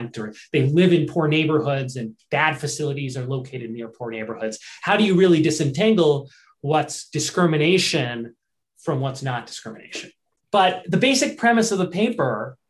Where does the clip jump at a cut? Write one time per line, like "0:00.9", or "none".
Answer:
none